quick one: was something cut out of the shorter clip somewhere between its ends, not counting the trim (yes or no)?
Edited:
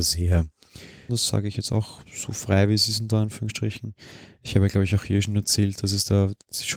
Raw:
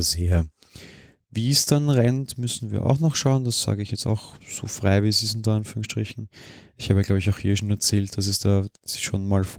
yes